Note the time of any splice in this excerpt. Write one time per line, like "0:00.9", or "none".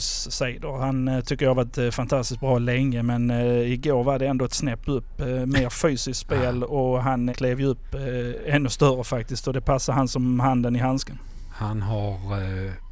0:07.3